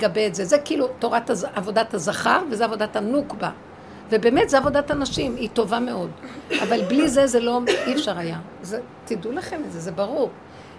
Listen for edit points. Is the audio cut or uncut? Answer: uncut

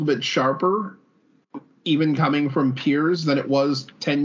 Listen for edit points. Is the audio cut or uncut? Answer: uncut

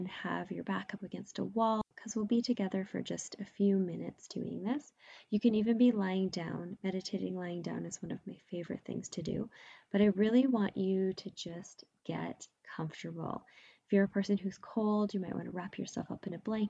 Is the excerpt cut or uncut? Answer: uncut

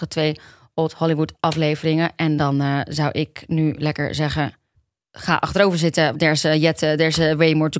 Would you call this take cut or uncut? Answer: cut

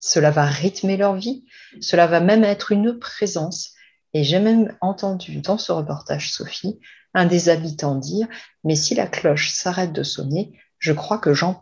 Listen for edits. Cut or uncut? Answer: uncut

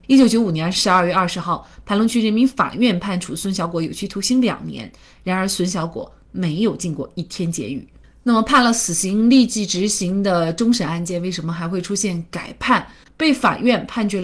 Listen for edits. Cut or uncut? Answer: uncut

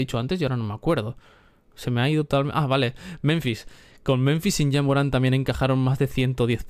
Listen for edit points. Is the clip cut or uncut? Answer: uncut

